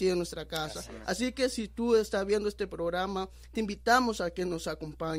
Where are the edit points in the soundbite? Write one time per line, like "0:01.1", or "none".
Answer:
none